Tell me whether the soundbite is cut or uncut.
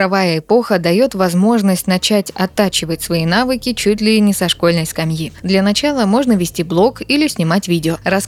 uncut